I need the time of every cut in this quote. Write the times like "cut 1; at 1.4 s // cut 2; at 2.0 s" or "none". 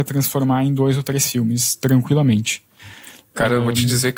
none